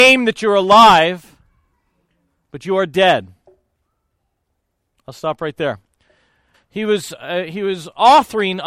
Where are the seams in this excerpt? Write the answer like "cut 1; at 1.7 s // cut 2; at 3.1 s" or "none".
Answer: cut 1; at 6.5 s